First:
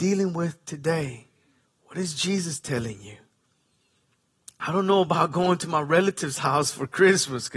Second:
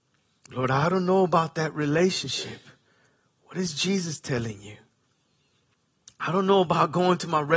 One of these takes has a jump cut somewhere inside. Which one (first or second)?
first